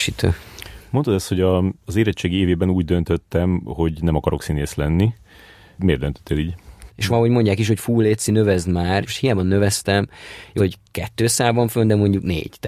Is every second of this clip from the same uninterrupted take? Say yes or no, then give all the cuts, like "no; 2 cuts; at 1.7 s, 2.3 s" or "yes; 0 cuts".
no; 3 cuts; at 6.9 s, 9.0 s, 10.6 s